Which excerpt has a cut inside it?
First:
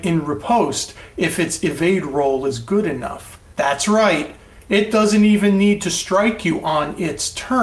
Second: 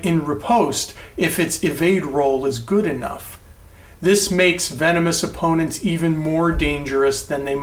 first; 2 cuts; at 3.5 s, 4.6 s

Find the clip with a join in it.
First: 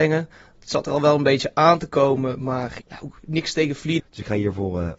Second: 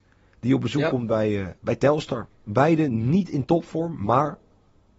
first; 2 cuts; at 2.8 s, 4.0 s

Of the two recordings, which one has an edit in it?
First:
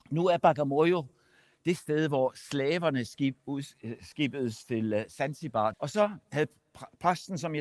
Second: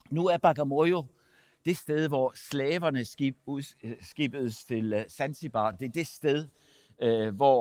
first; 1 cut; at 5.7 s

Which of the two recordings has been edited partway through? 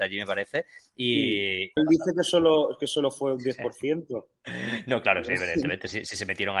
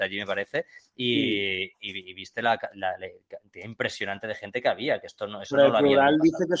first; 1 cut; at 1.8 s

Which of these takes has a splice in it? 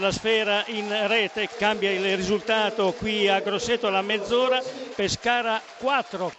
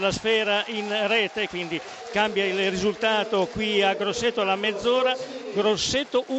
first; 2 cuts; at 1.5 s, 4.9 s

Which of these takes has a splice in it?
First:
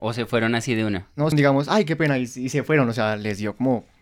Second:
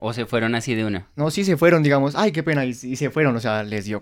first; 1 cut; at 1.3 s

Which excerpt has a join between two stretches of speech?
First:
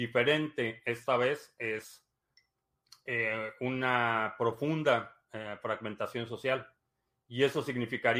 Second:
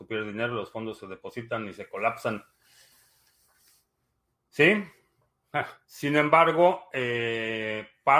second; 1 cut; at 5.8 s

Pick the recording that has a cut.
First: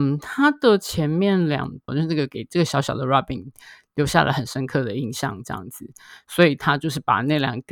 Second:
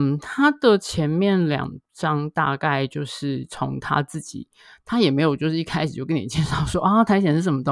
first; 1 cut; at 1.9 s

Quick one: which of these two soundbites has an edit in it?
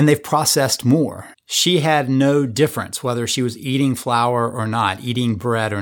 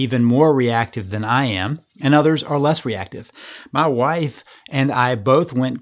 first; 1 cut; at 1.3 s

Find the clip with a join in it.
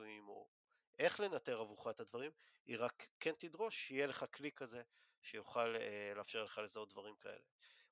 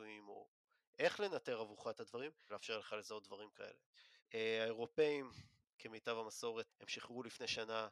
second; 3 cuts; at 2.5 s, 4.2 s, 6.7 s

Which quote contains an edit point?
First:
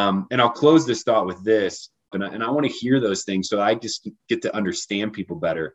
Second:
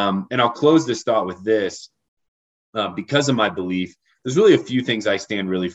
first; 1 cut; at 2.1 s

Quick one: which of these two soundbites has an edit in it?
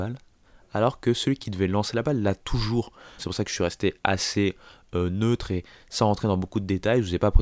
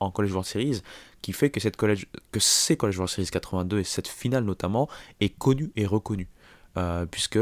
first; 1 cut; at 3.2 s

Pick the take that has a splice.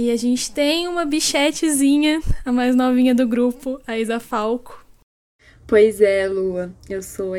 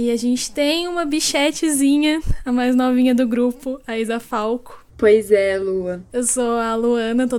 second; 2 cuts; at 4.9 s, 6.1 s

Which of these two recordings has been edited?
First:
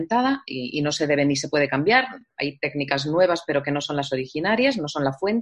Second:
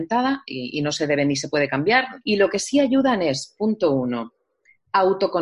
second; 1 cut; at 2.2 s

